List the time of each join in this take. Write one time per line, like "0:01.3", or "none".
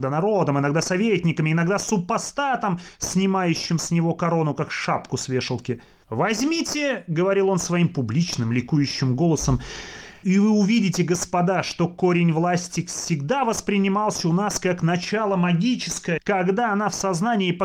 0:06.0
0:10.2
0:16.2